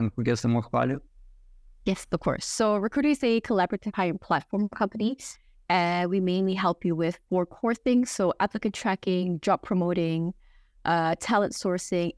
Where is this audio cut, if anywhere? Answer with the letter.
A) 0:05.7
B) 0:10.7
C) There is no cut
C